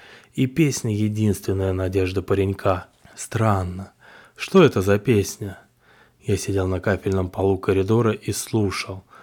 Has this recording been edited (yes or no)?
no